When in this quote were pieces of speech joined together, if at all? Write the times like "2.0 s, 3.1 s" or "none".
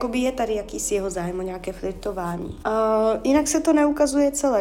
2.6 s

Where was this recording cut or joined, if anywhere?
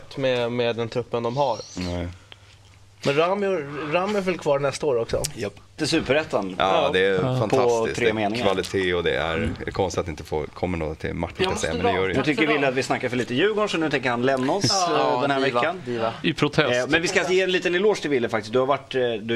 5.8 s, 11.3 s

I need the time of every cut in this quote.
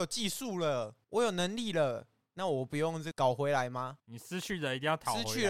none

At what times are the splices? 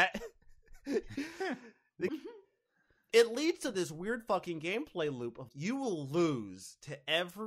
2.1 s, 5.5 s

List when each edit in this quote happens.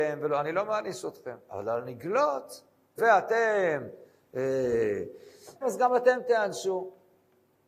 3.0 s, 5.6 s

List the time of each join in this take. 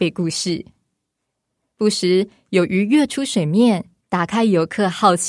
1.7 s, 4.0 s

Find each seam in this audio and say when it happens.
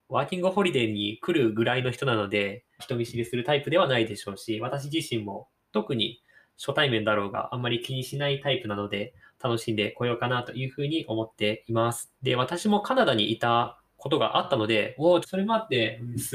2.8 s, 12.2 s, 15.2 s

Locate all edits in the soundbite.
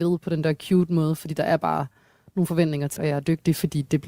3.0 s

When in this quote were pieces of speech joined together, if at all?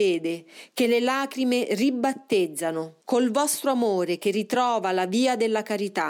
3.0 s

